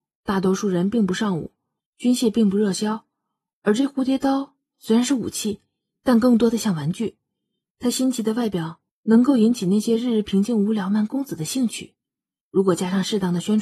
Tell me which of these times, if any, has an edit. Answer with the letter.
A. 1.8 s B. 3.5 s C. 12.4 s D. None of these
A